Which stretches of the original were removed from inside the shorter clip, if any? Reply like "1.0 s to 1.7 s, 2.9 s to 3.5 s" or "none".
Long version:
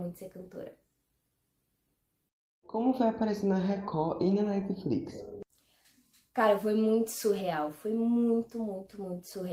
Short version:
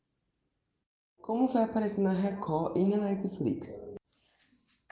none